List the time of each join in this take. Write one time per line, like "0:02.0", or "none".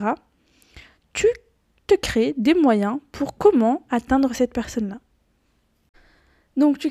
none